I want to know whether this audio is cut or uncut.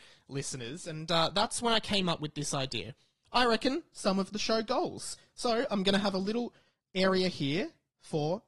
cut